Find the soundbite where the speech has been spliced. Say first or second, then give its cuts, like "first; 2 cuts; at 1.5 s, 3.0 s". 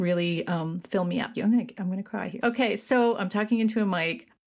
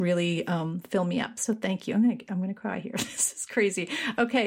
first; 2 cuts; at 1.3 s, 2.4 s